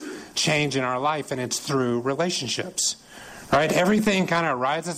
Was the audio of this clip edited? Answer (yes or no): no